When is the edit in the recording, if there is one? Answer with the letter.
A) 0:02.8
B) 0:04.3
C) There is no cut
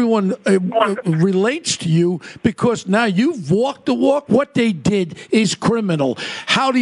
B